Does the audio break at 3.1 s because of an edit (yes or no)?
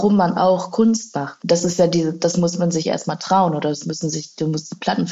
no